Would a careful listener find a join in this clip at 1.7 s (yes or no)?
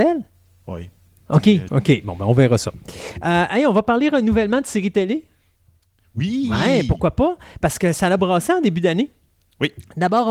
yes